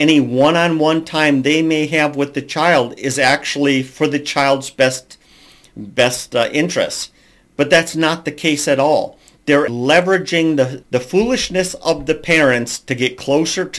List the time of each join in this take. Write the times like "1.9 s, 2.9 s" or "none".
9.7 s, 10.8 s